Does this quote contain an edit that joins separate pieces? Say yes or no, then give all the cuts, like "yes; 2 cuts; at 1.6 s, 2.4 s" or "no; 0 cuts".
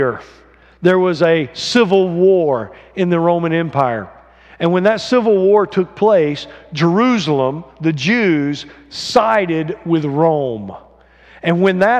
no; 0 cuts